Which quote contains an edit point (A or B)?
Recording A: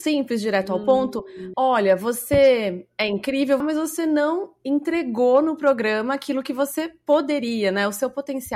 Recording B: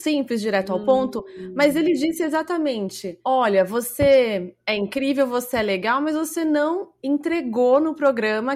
A